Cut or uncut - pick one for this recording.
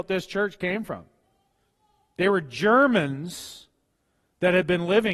uncut